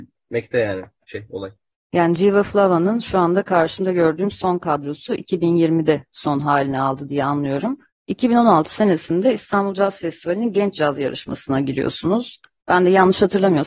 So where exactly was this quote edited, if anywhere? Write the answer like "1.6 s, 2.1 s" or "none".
7.9 s